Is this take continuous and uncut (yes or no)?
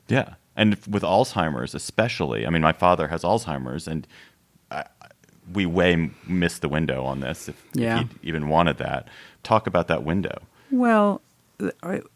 yes